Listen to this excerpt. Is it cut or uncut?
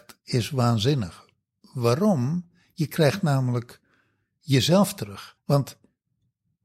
cut